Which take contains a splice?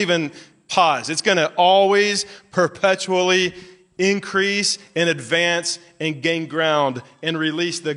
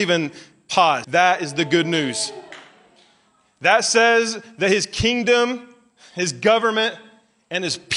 second; 1 cut; at 1.0 s

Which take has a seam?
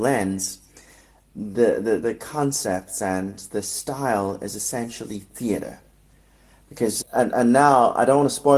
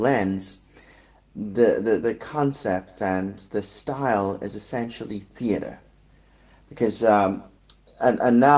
first; 1 cut; at 7.0 s

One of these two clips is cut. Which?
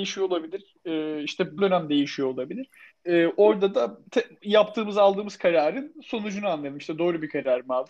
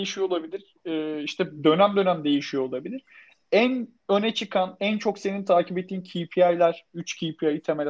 first; 3 cuts; at 1.6 s, 2.9 s, 4.1 s

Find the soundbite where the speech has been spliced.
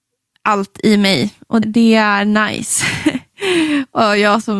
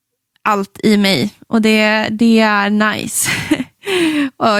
first; 1 cut; at 1.6 s

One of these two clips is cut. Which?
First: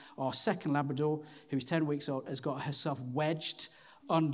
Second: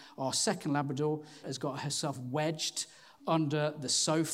second; 1 cut; at 1.4 s

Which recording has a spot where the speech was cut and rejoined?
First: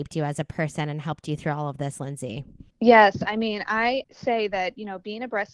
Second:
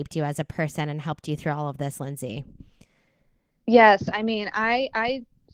first; 2 cuts; at 2.7 s, 4.0 s

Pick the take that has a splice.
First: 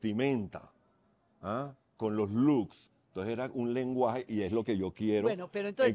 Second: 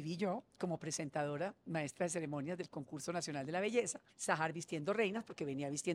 second; 1 cut; at 4.1 s

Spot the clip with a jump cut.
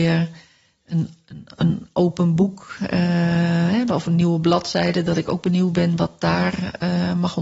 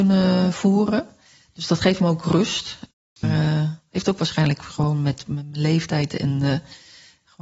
second; 1 cut; at 3.2 s

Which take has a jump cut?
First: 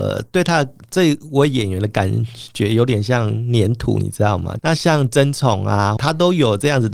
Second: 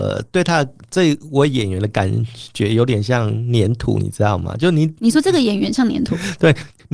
first; 2 cuts; at 4.6 s, 6.0 s

